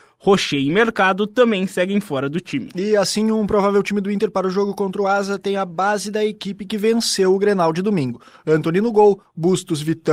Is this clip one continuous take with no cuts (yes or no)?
yes